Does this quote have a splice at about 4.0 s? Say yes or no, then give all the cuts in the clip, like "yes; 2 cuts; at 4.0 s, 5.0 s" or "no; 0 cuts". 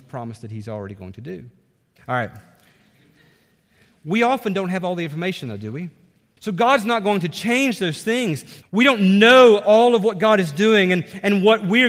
no; 3 cuts; at 2.0 s, 6.4 s, 8.6 s